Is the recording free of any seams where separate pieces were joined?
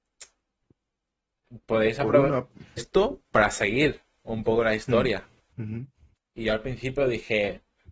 no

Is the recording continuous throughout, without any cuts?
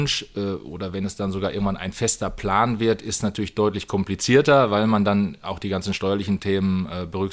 yes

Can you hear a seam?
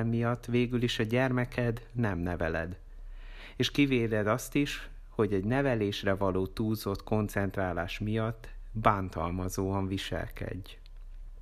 no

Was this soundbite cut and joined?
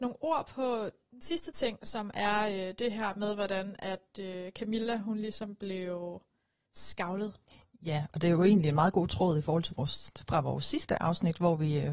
no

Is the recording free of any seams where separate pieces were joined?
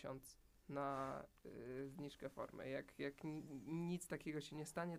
yes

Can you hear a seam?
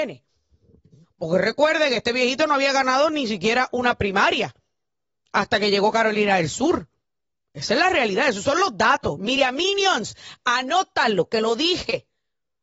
yes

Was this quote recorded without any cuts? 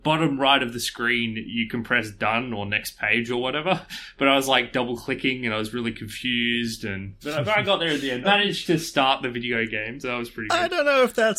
no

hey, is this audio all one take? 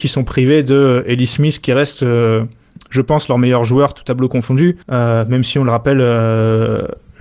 no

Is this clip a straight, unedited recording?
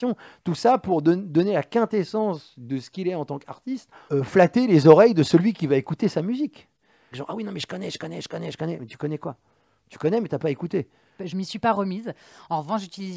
no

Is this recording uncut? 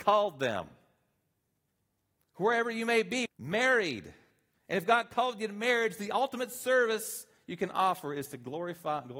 no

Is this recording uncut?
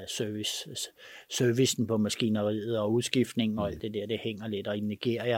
yes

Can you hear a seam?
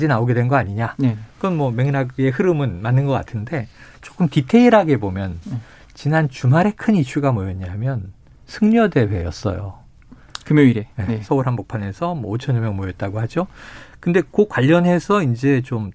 yes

